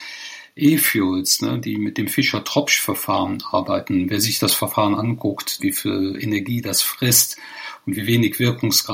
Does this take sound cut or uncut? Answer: cut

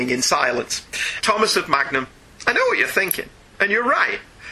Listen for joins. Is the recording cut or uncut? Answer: cut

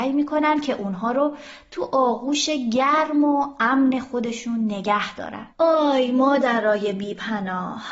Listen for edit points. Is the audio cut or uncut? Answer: cut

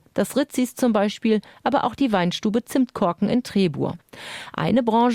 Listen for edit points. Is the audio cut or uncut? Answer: uncut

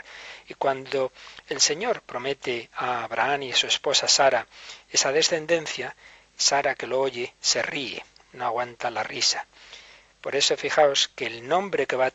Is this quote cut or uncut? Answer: uncut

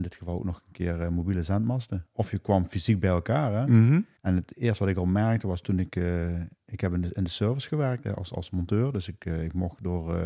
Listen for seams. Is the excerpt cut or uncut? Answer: cut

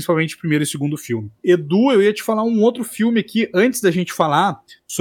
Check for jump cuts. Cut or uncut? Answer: uncut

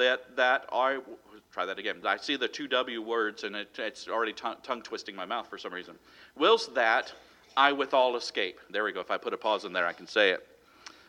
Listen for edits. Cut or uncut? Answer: cut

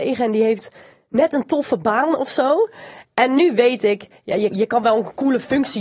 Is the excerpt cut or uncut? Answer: cut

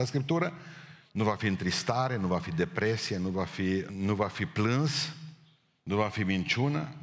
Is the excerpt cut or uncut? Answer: cut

